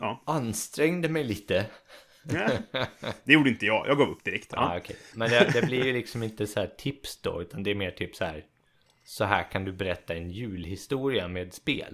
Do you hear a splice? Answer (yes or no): no